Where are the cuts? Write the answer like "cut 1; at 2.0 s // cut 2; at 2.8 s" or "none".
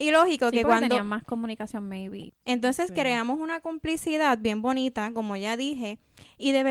cut 1; at 2.3 s